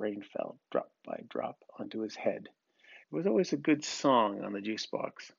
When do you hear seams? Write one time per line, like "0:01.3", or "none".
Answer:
0:03.0